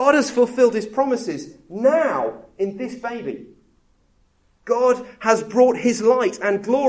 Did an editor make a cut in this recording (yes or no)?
no